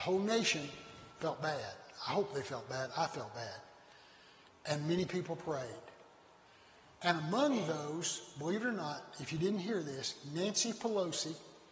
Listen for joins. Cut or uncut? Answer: uncut